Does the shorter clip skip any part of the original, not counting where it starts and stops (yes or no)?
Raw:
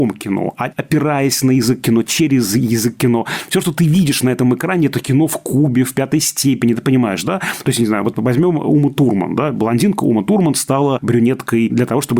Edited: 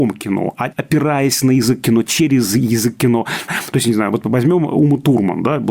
yes